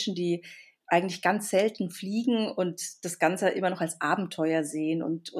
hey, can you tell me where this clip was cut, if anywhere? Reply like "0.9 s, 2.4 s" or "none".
none